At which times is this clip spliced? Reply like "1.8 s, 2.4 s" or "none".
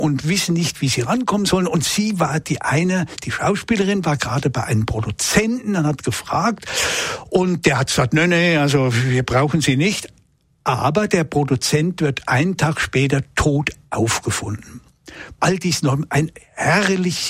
15.4 s